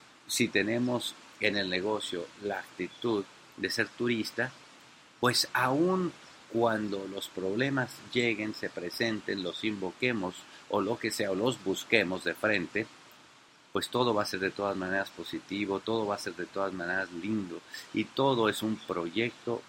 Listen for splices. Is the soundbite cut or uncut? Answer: uncut